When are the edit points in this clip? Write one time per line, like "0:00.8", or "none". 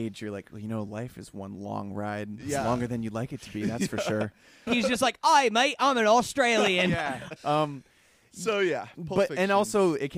0:04.7
0:07.4